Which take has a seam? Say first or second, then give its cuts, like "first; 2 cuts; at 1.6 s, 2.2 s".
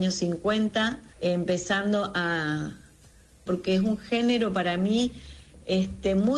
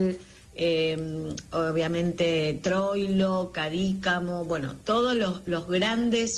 first; 2 cuts; at 1.1 s, 3.5 s